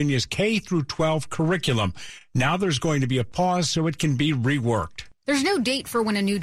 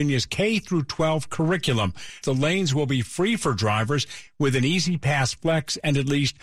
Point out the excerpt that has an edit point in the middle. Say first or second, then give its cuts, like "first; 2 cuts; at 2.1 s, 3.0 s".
second; 1 cut; at 2.2 s